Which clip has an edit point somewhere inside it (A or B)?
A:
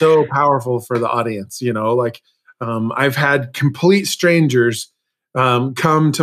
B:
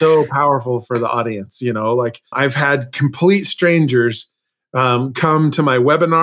B